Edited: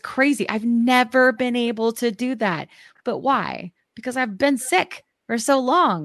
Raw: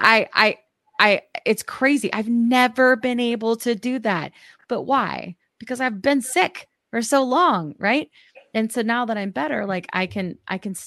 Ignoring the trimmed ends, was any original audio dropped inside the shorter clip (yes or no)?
no